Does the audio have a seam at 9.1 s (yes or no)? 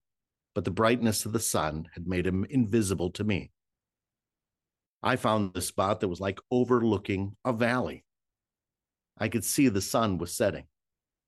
no